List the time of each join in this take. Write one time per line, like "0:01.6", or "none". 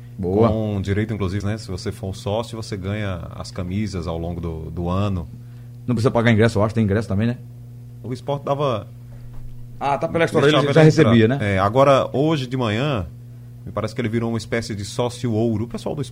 0:01.4
0:08.0